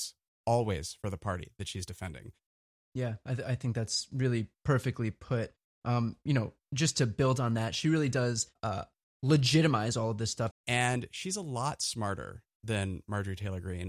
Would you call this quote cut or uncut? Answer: cut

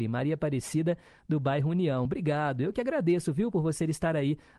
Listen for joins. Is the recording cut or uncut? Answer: uncut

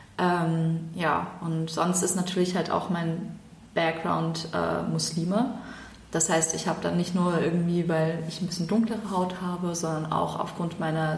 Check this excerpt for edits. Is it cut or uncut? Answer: uncut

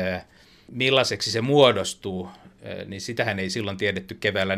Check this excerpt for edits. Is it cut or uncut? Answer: uncut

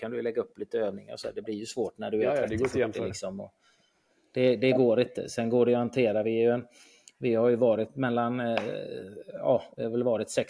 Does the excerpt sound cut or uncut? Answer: uncut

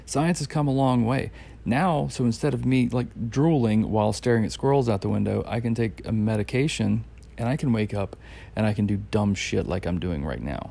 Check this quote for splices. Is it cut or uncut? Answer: uncut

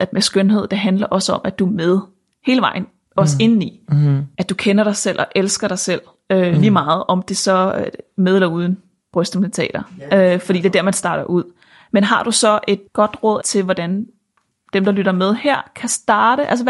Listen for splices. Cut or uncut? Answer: uncut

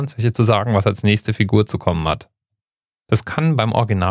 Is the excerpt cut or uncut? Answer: cut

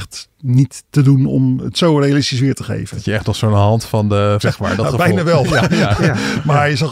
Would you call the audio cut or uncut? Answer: cut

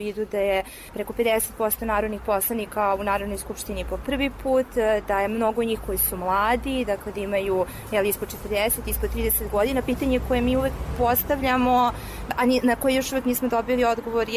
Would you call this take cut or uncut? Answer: uncut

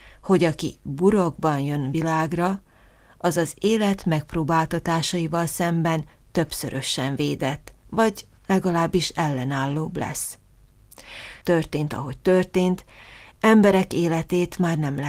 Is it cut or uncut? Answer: cut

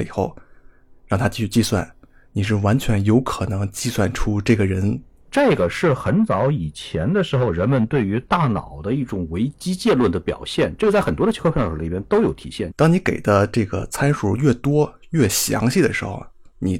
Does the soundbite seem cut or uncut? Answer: cut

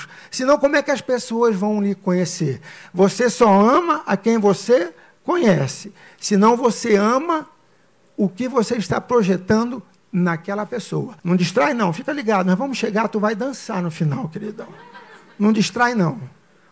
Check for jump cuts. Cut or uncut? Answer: cut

